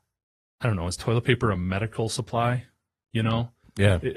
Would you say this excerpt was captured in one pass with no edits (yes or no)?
yes